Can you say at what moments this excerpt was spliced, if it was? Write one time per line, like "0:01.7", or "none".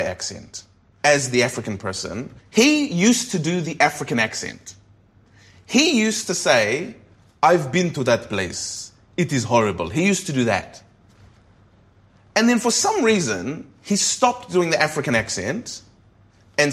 0:02.4